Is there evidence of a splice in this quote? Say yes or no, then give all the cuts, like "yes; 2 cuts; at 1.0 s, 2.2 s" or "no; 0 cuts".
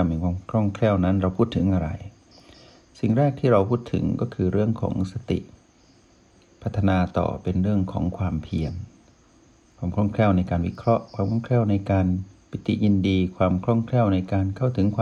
no; 0 cuts